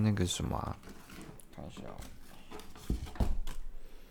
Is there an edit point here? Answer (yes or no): no